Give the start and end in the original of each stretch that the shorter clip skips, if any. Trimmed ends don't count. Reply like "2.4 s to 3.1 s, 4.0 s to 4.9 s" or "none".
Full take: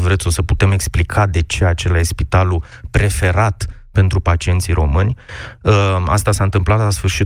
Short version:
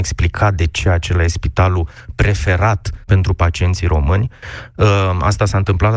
3.8 s to 3.9 s